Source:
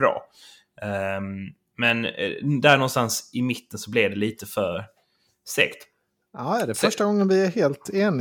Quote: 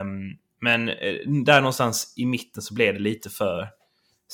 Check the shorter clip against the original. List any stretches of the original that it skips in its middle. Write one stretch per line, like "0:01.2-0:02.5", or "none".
none